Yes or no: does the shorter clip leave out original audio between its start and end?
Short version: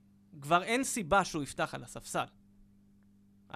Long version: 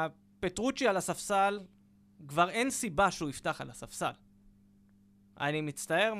no